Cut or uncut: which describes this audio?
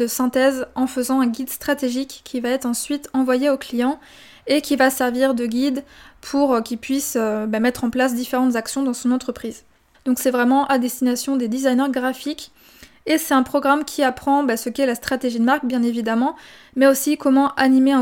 cut